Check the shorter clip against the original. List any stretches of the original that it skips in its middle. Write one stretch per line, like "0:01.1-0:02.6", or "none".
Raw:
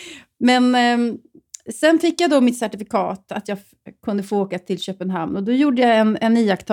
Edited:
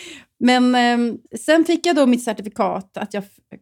0:01.3-0:01.6